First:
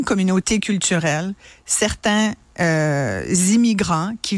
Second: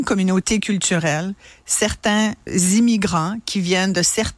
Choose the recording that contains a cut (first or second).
second